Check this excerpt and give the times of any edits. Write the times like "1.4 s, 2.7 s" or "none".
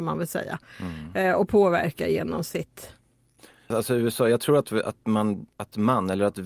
3.7 s